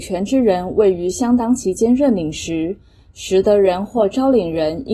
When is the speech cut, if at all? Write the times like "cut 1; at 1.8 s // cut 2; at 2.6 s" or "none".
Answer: none